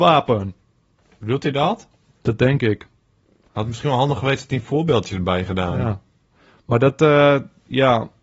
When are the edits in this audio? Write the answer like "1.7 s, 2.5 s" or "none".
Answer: none